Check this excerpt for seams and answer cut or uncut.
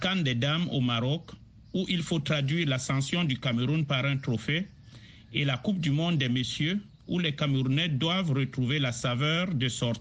uncut